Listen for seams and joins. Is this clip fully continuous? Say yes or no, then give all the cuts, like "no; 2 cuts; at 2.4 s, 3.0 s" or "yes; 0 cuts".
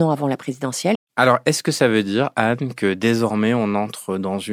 no; 1 cut; at 0.9 s